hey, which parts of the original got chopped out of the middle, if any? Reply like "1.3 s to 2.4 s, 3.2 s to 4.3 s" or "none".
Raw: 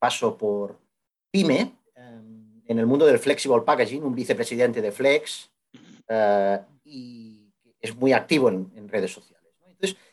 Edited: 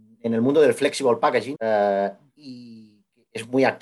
4.0 s to 6.0 s